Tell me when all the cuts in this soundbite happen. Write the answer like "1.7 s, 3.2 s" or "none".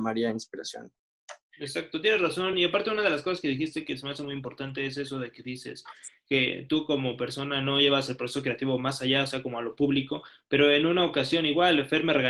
none